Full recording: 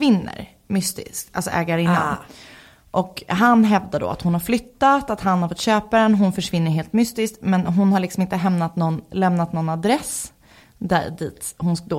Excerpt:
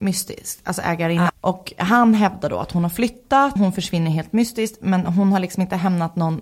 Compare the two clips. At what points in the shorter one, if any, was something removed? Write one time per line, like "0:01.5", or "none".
0:01.3
0:03.6